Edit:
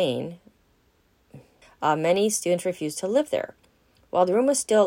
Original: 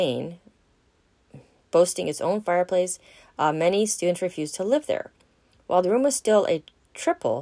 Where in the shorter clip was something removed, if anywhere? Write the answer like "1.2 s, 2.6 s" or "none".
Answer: 1.6 s